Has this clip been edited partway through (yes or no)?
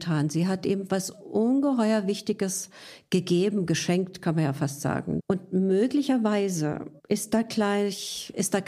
yes